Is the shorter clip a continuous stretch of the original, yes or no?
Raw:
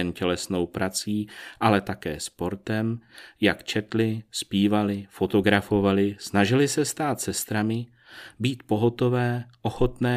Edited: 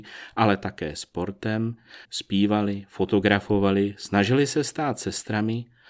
no